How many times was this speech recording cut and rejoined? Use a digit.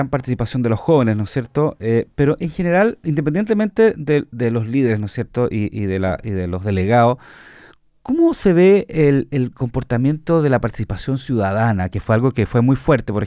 0